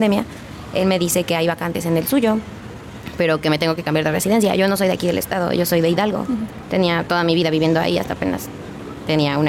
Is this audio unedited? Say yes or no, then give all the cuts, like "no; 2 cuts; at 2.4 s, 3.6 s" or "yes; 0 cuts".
yes; 0 cuts